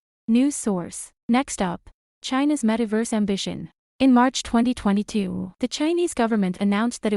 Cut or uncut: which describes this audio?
cut